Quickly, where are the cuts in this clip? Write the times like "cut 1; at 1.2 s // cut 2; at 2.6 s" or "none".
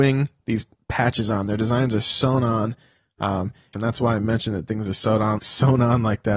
cut 1; at 3.7 s // cut 2; at 5.4 s